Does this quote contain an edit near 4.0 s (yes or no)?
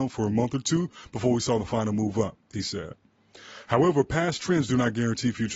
no